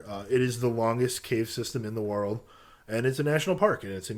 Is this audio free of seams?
yes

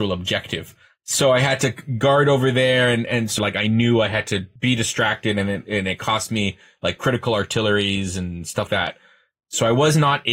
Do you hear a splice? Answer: yes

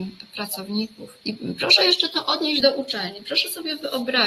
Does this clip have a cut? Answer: yes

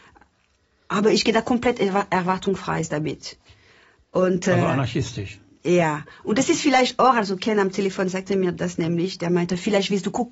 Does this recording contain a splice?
no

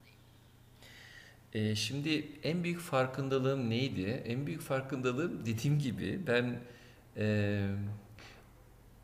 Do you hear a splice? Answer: no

